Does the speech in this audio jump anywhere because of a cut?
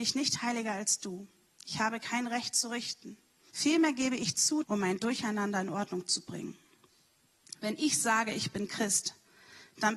yes; 2 cuts; at 3.5 s, 4.6 s

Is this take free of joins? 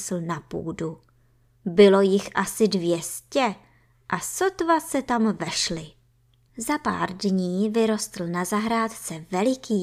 no; 1 cut; at 6.5 s

